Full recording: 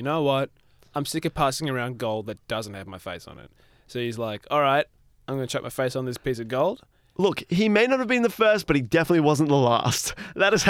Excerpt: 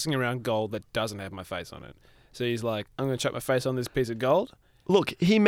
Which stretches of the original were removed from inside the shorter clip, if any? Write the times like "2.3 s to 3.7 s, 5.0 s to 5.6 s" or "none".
4.4 s to 5.2 s